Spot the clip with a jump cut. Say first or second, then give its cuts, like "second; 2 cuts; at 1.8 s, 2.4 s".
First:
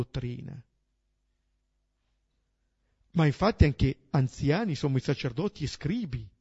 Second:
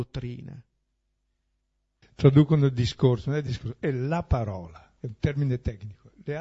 second; 2 cuts; at 2.0 s, 5.0 s